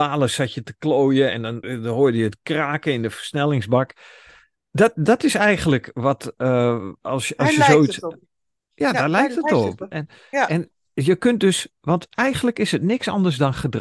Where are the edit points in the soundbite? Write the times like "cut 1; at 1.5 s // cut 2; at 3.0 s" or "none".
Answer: cut 1; at 1.6 s